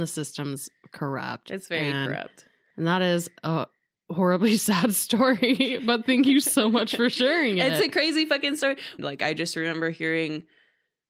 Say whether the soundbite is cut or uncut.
cut